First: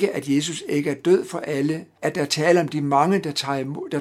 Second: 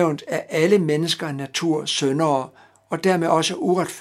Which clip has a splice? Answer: first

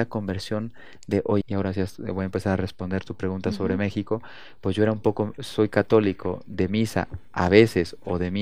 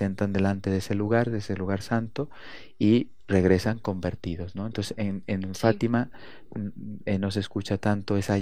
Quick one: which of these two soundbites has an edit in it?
first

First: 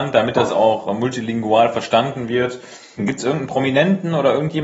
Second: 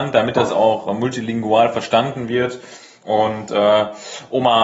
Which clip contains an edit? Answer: first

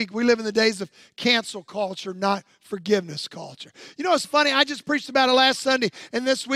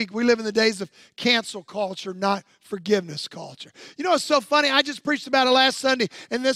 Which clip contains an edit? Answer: first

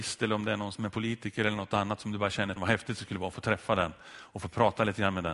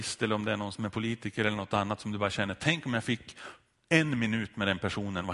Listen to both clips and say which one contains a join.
first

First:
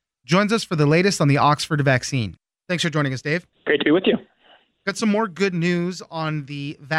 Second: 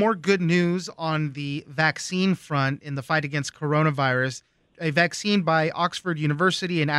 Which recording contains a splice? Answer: first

